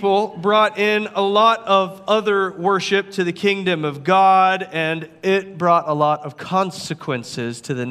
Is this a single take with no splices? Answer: yes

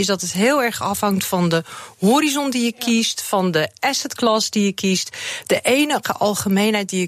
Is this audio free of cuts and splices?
yes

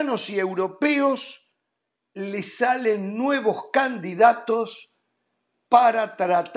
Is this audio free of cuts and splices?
yes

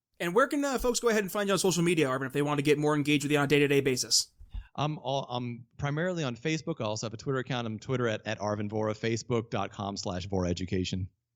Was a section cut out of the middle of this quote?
no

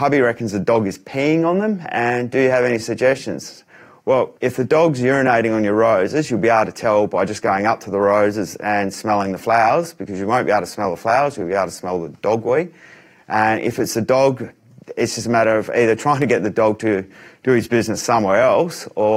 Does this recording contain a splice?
yes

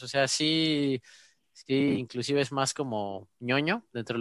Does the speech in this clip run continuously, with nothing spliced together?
yes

